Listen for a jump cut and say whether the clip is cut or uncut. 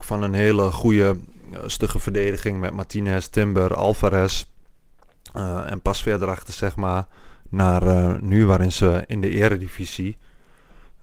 uncut